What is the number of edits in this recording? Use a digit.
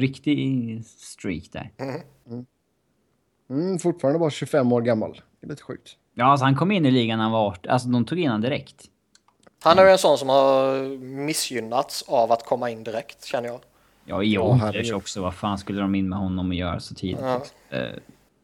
1